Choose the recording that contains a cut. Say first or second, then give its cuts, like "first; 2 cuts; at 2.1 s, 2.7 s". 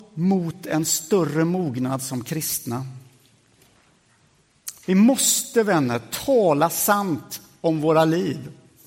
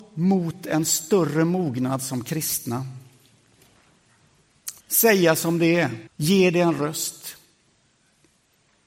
second; 2 cuts; at 4.8 s, 6.1 s